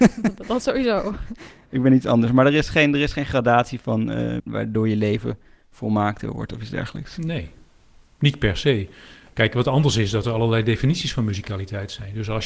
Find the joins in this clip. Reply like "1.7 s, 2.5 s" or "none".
4.4 s